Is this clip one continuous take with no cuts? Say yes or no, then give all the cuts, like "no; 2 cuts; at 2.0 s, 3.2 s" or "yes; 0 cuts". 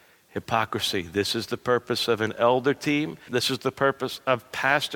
no; 1 cut; at 3.3 s